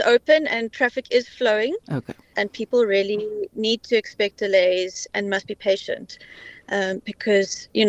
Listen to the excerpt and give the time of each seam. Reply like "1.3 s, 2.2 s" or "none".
2.3 s, 5.1 s